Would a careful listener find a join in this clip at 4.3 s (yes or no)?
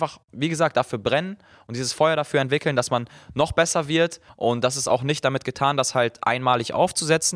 yes